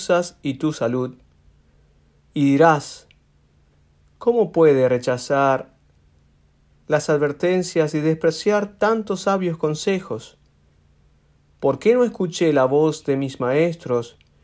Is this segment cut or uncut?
uncut